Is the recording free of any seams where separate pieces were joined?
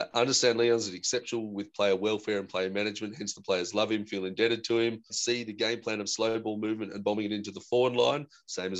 no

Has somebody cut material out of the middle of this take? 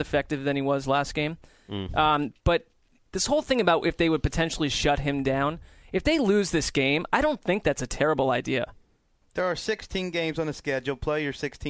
yes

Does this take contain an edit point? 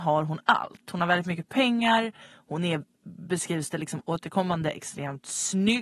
no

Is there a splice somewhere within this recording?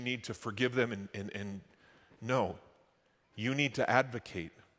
no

